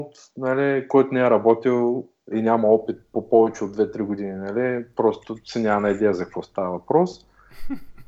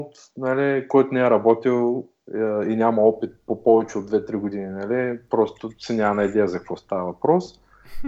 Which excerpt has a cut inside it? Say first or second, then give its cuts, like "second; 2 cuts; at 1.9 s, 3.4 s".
first; 1 cut; at 2.3 s